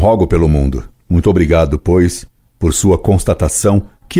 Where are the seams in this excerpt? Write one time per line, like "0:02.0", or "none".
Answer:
0:00.9